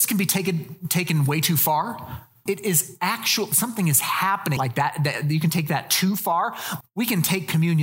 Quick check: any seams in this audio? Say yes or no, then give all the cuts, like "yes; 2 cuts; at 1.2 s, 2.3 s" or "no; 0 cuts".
yes; 3 cuts; at 2.5 s, 4.6 s, 6.8 s